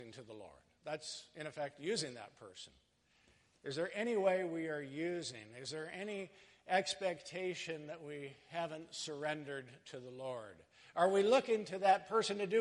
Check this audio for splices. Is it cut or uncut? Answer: uncut